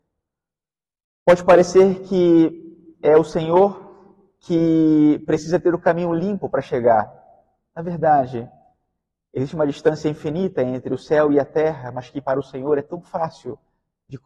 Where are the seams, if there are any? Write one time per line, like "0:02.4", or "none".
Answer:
none